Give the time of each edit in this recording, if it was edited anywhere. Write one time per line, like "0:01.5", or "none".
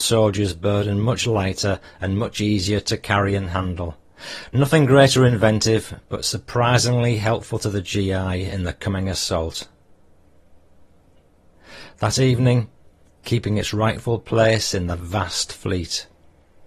0:13.2